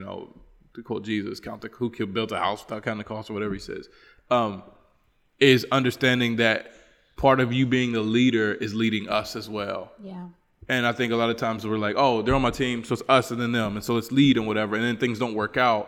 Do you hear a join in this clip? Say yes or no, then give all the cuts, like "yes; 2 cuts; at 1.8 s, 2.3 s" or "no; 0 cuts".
no; 0 cuts